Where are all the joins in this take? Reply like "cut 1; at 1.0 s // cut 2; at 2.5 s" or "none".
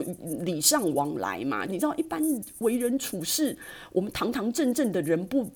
cut 1; at 1.7 s

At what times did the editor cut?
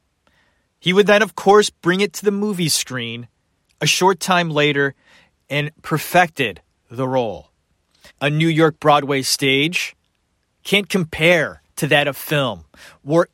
cut 1; at 8.1 s // cut 2; at 11.7 s

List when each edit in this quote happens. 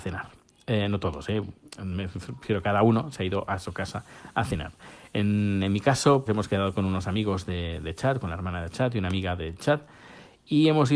cut 1; at 6.3 s

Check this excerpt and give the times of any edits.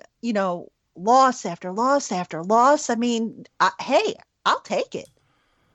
none

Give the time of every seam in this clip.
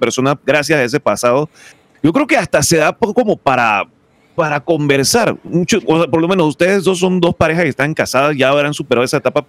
none

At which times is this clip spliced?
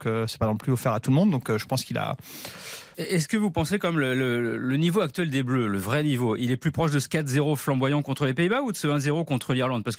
cut 1; at 2.9 s // cut 2; at 6.4 s

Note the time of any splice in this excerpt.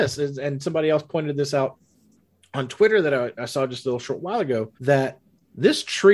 cut 1; at 4.7 s

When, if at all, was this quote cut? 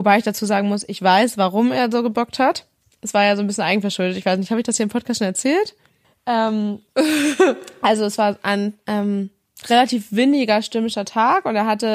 none

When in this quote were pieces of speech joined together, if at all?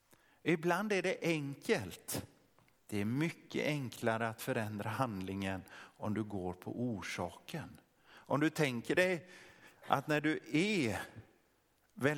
cut 1; at 2.8 s // cut 2; at 9.8 s

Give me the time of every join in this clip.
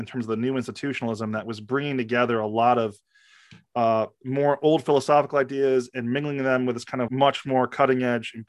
cut 1; at 7.1 s

